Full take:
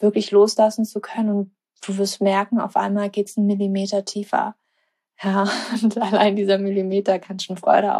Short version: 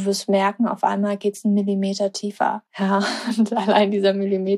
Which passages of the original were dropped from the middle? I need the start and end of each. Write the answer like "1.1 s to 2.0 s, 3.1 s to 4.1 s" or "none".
4.6 s to 5.1 s